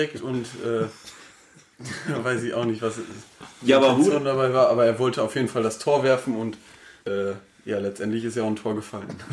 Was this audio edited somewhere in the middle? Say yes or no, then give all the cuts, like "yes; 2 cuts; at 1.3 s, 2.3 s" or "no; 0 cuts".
no; 0 cuts